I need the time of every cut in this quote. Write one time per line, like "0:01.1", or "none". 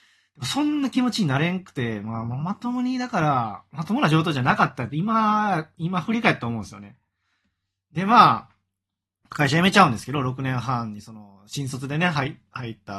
none